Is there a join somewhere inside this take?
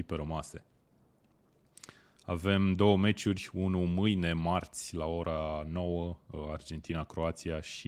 no; 0 cuts

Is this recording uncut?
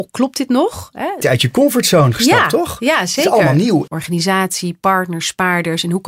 no; 2 cuts; at 1.2 s, 3.9 s

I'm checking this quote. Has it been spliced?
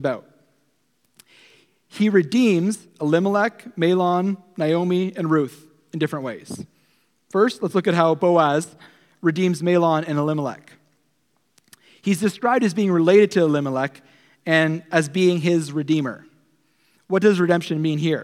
no; 0 cuts

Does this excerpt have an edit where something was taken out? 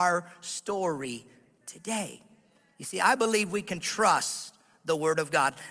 no; 0 cuts

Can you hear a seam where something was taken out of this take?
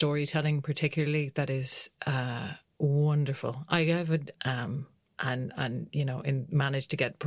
yes; 1 cut; at 4.3 s

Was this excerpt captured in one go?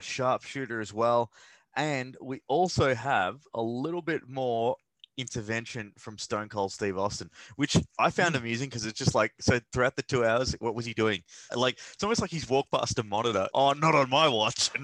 no; 2 cuts; at 11.5 s, 13.5 s

